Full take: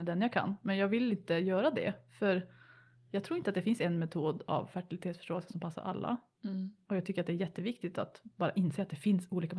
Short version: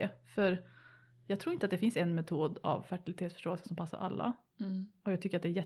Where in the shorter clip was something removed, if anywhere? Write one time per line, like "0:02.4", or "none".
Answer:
none